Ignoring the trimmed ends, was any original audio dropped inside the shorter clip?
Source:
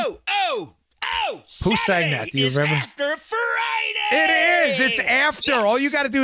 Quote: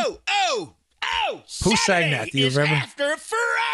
no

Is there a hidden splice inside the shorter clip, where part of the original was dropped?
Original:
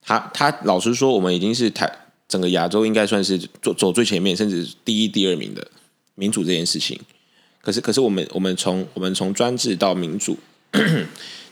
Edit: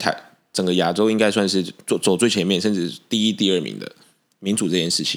no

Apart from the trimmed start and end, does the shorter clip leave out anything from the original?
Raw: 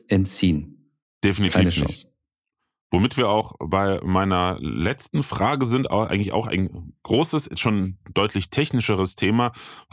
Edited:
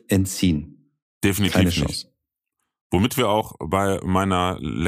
no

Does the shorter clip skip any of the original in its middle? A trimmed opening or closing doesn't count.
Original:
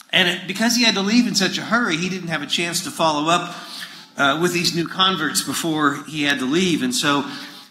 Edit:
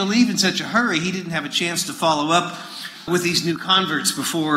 yes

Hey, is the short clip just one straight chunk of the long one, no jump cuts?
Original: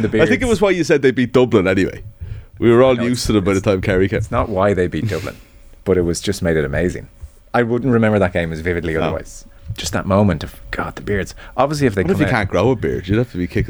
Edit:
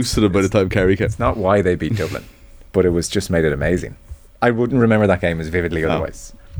yes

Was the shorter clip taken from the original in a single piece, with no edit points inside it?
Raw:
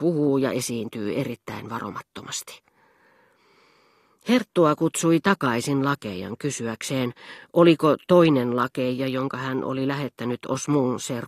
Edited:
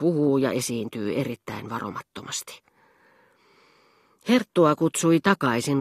yes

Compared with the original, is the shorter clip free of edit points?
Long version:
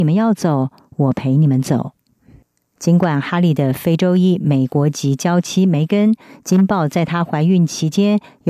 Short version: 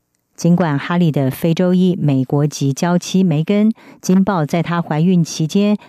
yes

